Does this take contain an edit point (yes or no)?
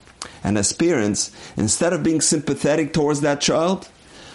no